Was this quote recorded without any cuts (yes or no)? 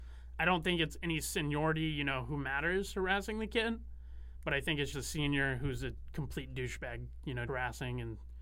no